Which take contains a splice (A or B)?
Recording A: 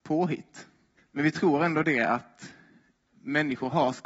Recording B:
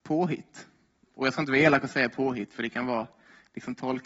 A